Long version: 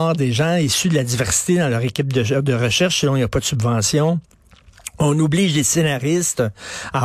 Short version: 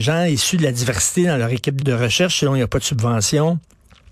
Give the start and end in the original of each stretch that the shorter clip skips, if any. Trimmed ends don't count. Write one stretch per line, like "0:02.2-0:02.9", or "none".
0:02.1-0:02.4